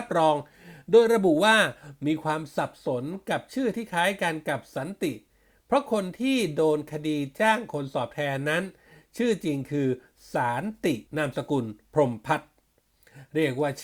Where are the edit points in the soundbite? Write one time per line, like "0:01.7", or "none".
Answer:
0:11.1